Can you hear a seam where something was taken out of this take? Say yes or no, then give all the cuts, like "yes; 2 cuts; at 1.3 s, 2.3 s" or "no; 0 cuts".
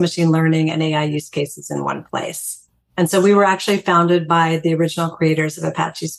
no; 0 cuts